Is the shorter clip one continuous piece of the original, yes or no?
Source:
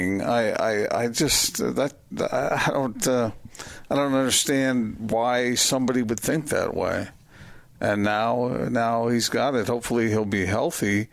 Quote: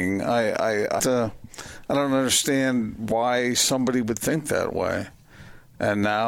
no